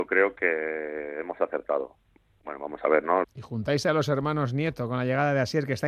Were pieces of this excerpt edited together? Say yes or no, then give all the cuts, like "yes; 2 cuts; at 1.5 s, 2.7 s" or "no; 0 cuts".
yes; 1 cut; at 3.2 s